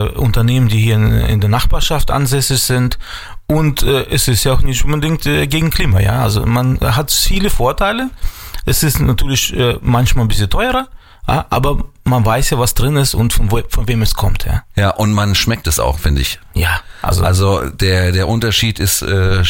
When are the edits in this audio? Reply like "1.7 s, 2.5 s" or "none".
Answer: none